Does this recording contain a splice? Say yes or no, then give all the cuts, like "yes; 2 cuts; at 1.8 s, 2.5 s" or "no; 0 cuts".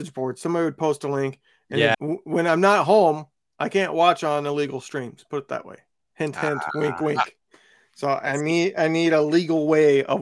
yes; 1 cut; at 1.9 s